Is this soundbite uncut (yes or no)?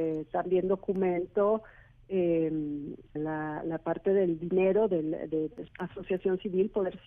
no